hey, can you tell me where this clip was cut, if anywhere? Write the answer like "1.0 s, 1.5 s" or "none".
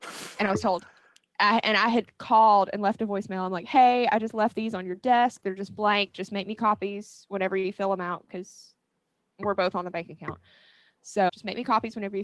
11.3 s